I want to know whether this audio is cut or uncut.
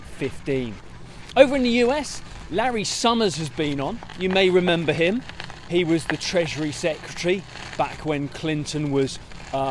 uncut